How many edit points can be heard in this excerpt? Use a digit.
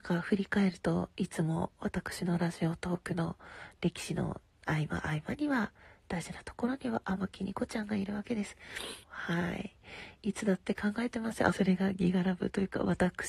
2